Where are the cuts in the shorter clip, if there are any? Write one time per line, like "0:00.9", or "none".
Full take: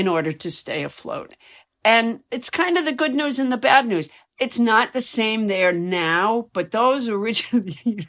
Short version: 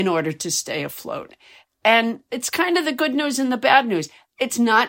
none